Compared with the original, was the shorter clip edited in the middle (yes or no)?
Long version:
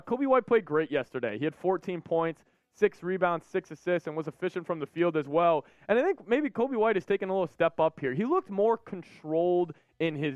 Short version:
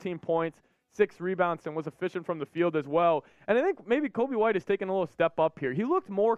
yes